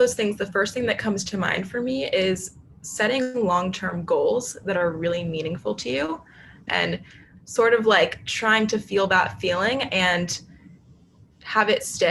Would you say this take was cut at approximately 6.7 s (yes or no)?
yes